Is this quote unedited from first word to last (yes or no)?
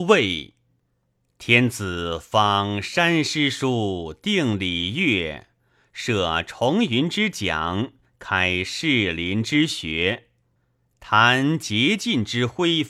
yes